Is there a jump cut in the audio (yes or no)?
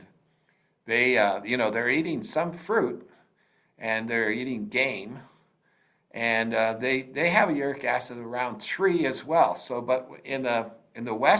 no